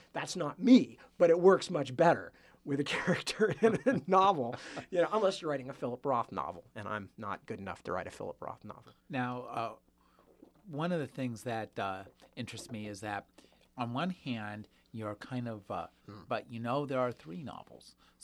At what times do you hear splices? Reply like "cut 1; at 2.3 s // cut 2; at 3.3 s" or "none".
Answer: cut 1; at 9.0 s // cut 2; at 16.0 s